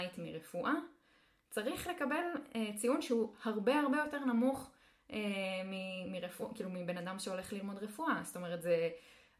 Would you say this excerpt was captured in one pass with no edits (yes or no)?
yes